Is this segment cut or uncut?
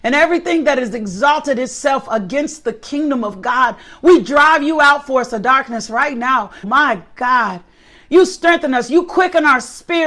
cut